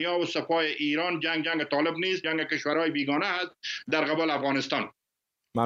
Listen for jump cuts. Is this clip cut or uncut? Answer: cut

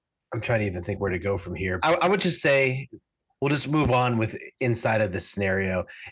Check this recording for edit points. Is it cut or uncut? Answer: cut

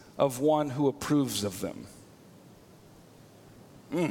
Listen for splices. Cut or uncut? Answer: uncut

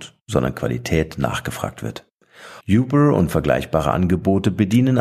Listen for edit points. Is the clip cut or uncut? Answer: cut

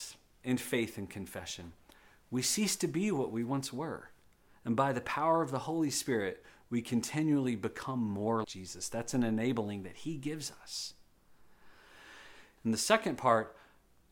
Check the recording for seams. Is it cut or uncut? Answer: cut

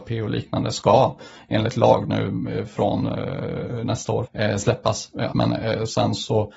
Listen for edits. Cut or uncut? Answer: cut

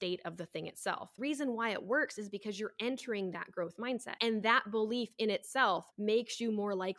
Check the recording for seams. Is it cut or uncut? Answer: cut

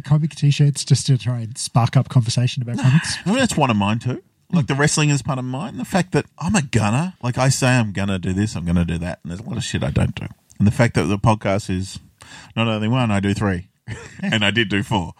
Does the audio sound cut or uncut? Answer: cut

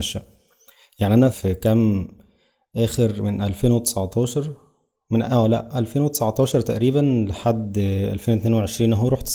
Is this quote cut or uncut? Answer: cut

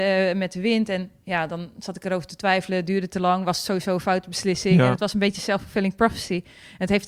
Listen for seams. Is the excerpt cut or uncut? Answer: uncut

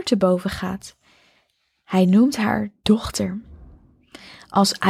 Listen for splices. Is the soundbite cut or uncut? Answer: uncut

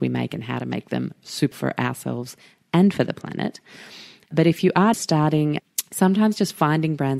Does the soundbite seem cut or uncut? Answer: cut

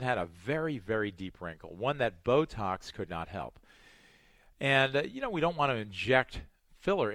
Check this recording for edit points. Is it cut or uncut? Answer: uncut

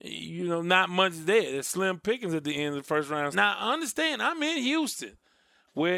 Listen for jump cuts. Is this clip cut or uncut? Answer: cut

